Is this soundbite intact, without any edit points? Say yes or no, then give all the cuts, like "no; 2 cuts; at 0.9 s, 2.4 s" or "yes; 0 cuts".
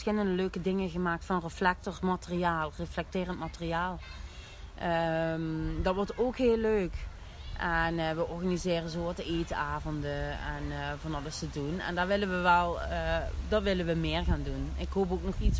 yes; 0 cuts